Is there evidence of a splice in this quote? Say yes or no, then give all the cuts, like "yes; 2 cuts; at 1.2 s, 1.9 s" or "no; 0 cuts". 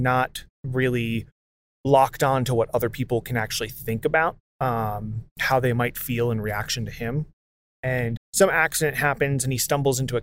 yes; 1 cut; at 8.2 s